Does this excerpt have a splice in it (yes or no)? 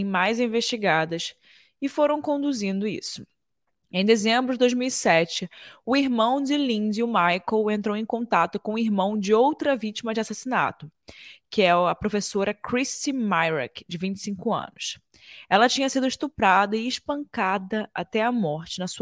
no